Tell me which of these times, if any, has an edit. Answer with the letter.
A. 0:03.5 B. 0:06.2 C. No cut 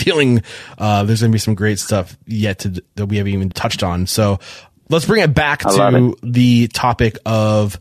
A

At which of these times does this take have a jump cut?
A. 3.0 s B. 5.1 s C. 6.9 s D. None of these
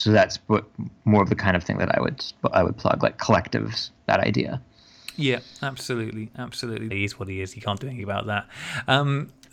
C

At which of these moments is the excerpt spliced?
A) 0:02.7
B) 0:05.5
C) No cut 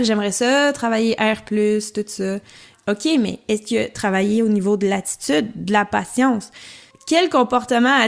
A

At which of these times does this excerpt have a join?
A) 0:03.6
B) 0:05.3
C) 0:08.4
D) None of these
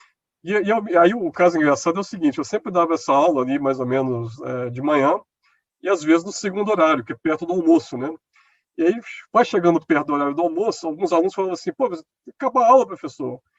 D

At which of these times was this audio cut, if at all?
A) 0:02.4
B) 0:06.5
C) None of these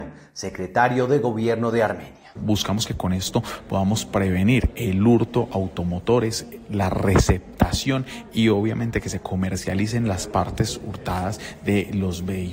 A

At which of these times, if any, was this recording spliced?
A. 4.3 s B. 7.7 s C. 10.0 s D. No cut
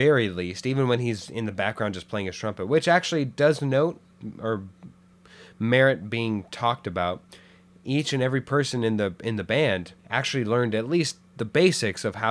C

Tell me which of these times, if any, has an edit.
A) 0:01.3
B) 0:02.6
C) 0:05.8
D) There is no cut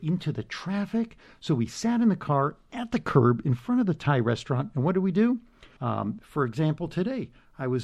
C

